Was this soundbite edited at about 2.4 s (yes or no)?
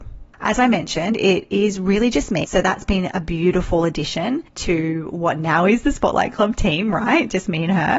yes